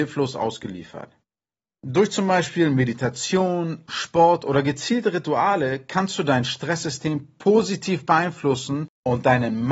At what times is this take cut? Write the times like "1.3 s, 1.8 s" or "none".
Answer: 3.9 s